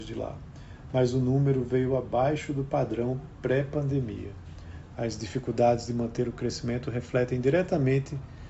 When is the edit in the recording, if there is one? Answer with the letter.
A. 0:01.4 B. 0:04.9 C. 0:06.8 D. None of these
D